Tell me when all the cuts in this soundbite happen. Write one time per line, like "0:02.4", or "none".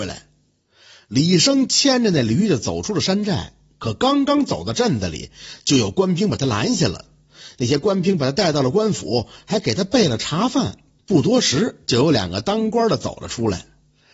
none